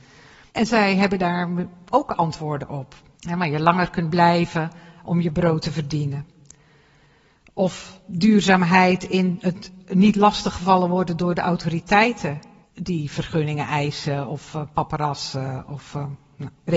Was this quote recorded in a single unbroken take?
no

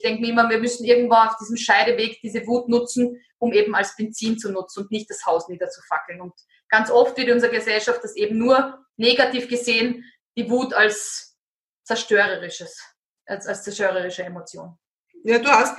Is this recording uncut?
yes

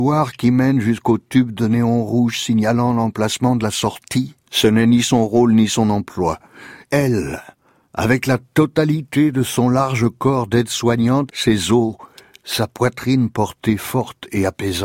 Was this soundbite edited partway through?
yes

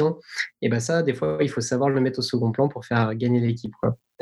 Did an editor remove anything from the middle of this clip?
no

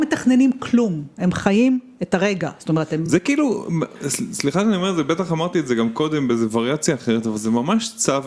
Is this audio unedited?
yes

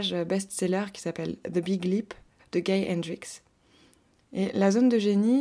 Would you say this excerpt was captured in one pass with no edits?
no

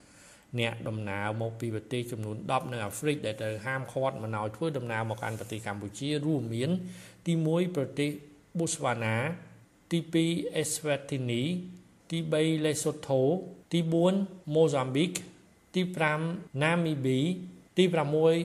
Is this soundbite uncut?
yes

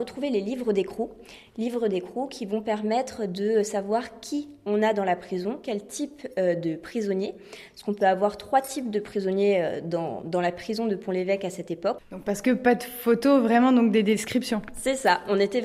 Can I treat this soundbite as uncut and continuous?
no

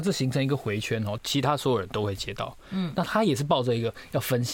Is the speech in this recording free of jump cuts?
no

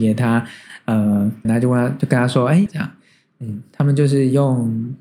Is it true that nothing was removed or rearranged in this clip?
no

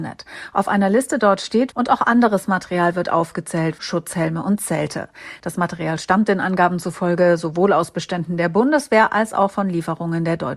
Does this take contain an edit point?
yes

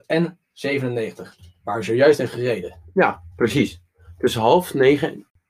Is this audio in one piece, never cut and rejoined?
yes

